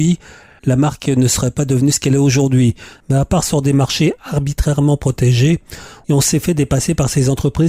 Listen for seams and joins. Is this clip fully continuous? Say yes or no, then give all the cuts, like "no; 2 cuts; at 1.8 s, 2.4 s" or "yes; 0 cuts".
no; 1 cut; at 2.9 s